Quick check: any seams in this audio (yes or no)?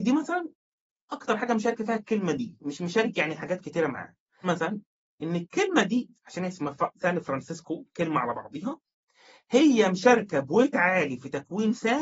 yes